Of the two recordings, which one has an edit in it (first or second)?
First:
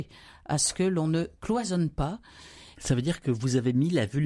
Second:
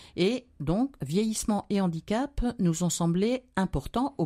first